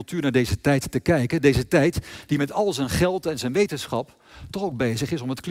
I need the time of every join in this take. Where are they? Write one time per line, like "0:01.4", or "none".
none

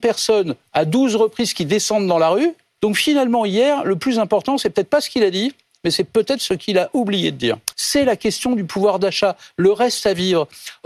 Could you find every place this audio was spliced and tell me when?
0:02.8
0:07.7

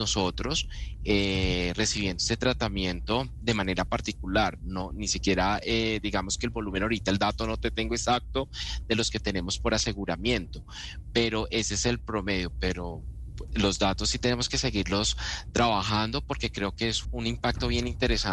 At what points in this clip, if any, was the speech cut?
0:13.5
0:17.0

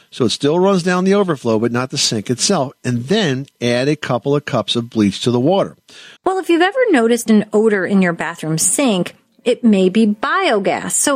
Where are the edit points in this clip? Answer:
0:06.2

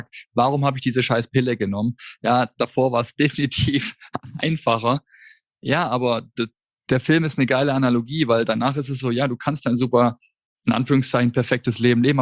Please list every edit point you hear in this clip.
none

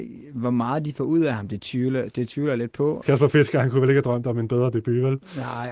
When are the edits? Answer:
0:03.0

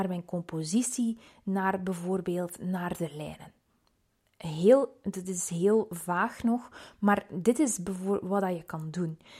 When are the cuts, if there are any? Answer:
none

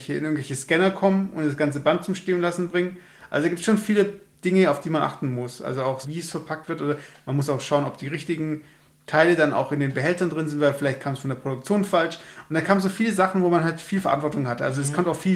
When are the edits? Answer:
0:06.0

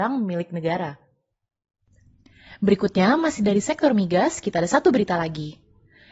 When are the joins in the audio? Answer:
none

